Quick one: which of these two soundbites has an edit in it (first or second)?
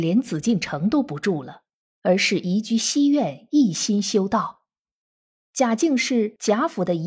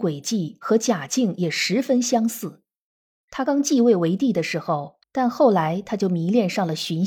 second